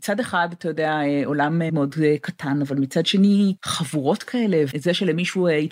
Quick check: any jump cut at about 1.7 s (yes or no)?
yes